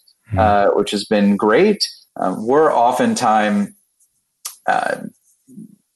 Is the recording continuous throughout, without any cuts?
no; 1 cut; at 2.1 s

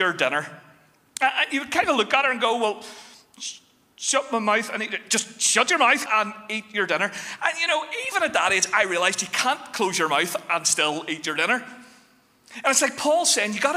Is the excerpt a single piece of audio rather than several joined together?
no; 1 cut; at 6.1 s

